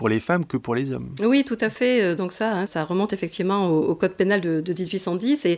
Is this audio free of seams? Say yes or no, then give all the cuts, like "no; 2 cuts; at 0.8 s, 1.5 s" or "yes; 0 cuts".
yes; 0 cuts